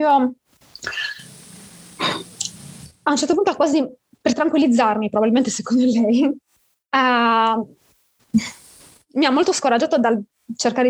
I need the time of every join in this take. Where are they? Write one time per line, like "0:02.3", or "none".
none